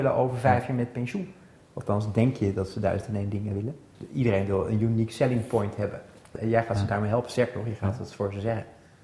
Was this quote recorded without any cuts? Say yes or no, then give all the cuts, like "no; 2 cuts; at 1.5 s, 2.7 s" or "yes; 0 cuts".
no; 1 cut; at 1.6 s